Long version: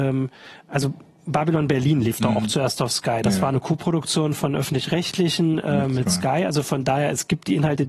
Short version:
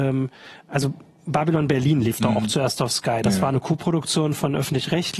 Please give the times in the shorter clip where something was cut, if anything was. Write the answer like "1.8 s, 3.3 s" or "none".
none